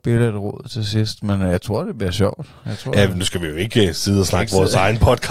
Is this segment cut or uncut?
uncut